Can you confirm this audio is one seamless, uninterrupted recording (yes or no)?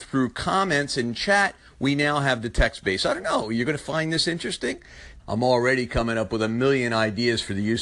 no